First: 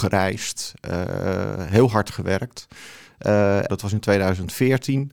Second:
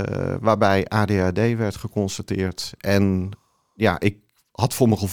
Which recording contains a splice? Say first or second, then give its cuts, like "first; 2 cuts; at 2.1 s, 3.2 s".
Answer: first; 1 cut; at 3.7 s